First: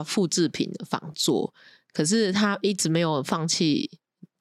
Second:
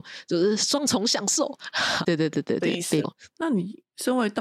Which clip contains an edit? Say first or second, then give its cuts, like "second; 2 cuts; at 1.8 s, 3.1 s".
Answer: second; 2 cuts; at 2.0 s, 3.0 s